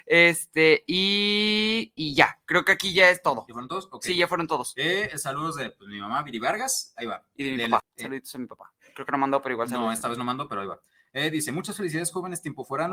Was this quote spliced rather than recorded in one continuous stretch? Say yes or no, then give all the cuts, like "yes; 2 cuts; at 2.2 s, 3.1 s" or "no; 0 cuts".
yes; 1 cut; at 7.8 s